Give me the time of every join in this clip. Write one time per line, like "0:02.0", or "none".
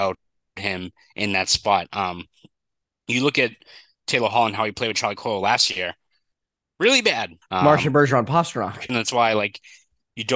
0:07.4
0:08.9